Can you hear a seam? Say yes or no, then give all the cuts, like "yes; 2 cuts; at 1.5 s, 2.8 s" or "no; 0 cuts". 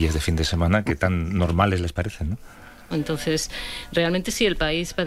yes; 1 cut; at 2.9 s